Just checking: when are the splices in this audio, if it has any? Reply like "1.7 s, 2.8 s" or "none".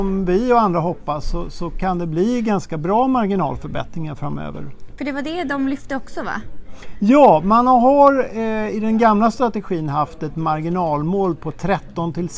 none